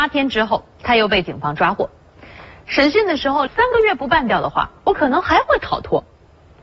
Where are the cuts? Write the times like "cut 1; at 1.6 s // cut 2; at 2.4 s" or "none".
cut 1; at 3.5 s